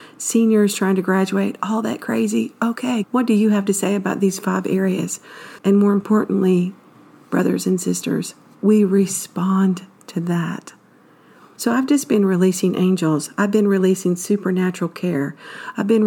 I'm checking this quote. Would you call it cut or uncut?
cut